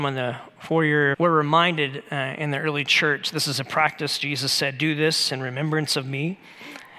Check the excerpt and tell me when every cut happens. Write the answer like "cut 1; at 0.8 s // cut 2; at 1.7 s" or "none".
cut 1; at 1.1 s